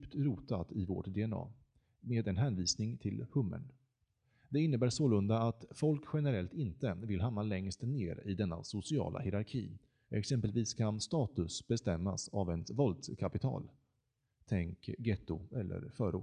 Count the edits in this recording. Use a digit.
1